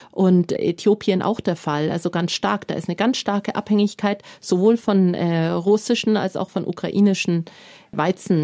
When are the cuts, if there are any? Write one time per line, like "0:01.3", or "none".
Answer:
none